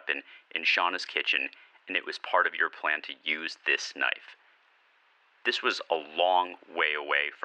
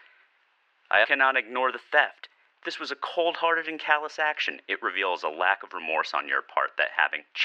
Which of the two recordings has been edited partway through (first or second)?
second